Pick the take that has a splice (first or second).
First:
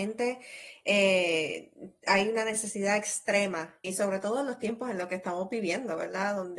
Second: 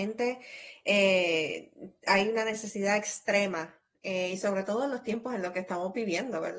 first